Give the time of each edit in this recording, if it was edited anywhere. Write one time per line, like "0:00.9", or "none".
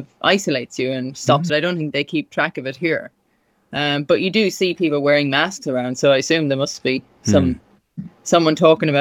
0:01.5